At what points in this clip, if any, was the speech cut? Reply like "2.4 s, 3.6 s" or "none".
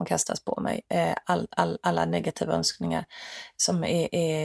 1.2 s

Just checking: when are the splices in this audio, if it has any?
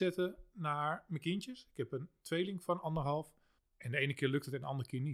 3.6 s

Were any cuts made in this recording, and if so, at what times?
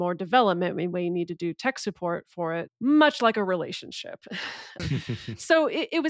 2.7 s, 4.8 s

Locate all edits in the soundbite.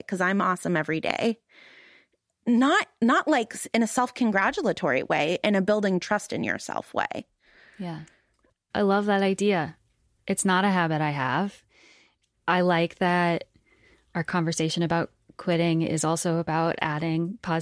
none

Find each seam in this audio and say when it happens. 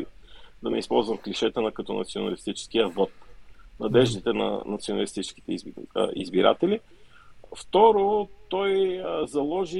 7.4 s

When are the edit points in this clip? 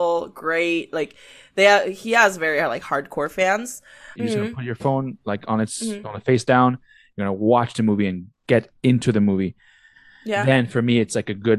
4.2 s

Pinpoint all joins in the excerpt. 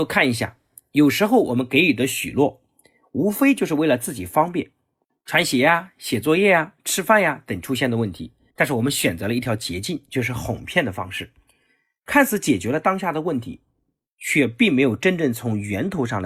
8.5 s

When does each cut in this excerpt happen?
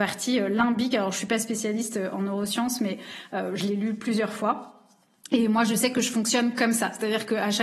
none

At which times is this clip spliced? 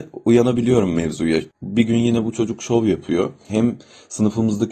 1.5 s, 3.5 s

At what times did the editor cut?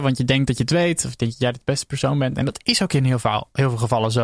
none

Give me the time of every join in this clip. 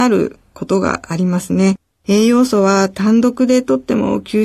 none

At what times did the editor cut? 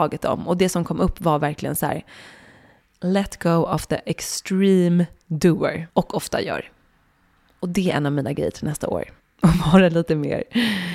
5.9 s, 9.2 s

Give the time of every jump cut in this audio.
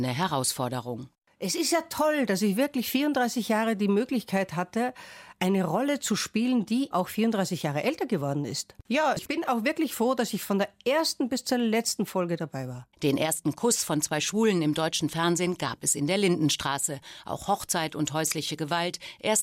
6.9 s, 12.9 s

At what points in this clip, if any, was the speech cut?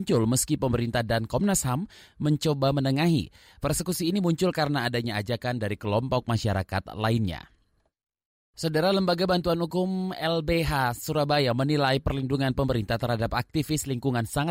none

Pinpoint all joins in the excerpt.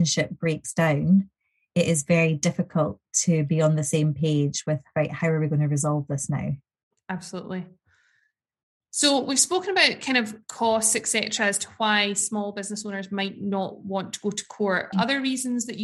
10.4 s, 14.9 s

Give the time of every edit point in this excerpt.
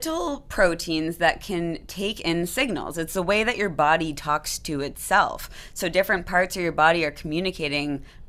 none

